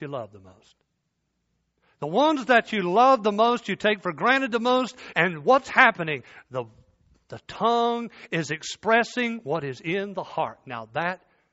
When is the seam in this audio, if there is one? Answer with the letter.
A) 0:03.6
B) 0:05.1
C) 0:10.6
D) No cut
B